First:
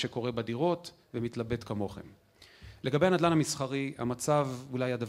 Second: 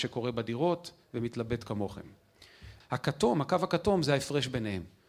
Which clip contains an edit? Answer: second; 1 cut; at 2.8 s

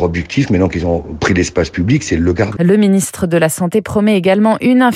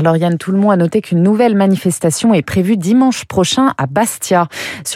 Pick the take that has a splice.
first; 1 cut; at 2.6 s

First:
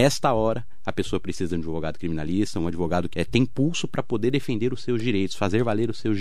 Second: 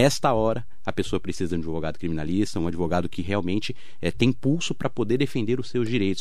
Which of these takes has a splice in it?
first; 1 cut; at 3.1 s

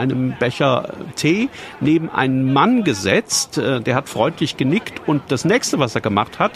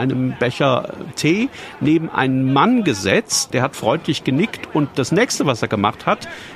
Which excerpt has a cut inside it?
second; 1 cut; at 3.5 s

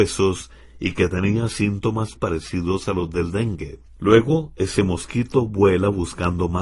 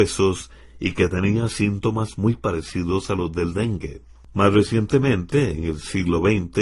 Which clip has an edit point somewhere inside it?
first; 2 cuts; at 2.1 s, 3.9 s

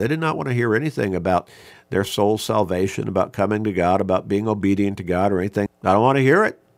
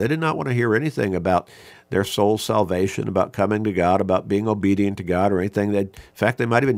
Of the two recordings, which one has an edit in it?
first; 1 cut; at 5.7 s

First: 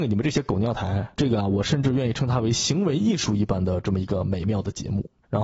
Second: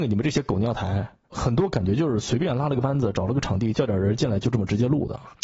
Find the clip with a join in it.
first; 1 cut; at 1.1 s

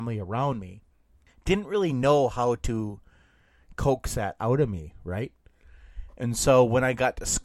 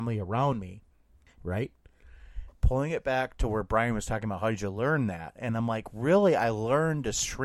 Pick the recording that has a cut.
second; 2 cuts; at 1.4 s, 2.5 s

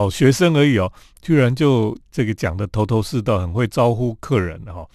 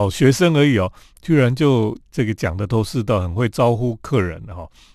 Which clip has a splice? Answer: second; 1 cut; at 2.7 s

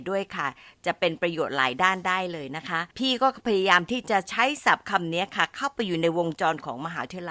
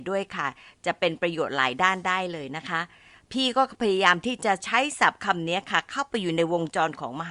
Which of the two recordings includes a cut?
first; 1 cut; at 2.9 s

